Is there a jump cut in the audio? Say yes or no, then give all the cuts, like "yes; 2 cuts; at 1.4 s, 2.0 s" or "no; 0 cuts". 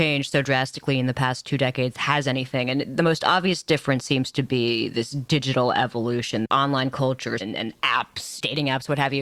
yes; 1 cut; at 7.4 s